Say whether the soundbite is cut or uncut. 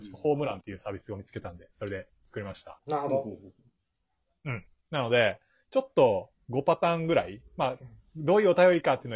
cut